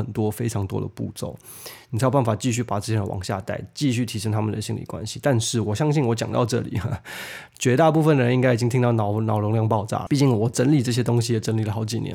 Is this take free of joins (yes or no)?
no